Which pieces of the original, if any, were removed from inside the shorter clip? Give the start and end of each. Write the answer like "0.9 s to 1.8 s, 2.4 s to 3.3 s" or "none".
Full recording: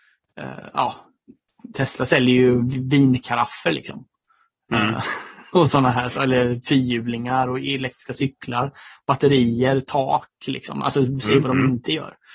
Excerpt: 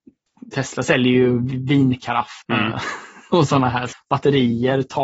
3.6 s to 4.6 s, 6.1 s to 8.9 s